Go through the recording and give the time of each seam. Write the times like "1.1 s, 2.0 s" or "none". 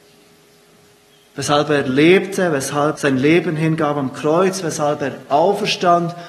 3.0 s